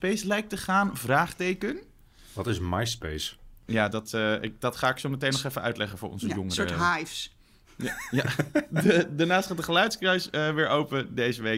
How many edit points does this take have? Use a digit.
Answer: 0